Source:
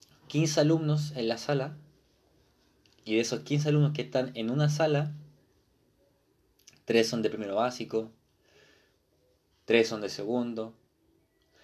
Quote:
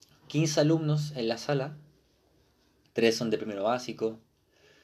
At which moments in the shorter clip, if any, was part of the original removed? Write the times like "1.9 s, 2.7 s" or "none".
2.8 s